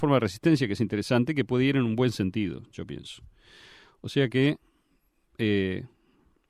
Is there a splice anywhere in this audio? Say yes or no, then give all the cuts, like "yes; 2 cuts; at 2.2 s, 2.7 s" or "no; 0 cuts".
no; 0 cuts